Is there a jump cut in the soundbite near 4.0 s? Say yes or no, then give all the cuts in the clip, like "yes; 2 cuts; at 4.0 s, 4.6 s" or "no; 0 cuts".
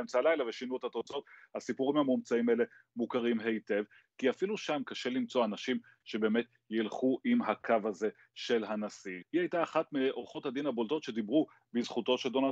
yes; 2 cuts; at 4.0 s, 9.2 s